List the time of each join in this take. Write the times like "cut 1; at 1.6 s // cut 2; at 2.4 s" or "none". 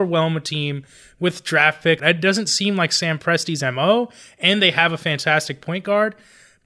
cut 1; at 2.0 s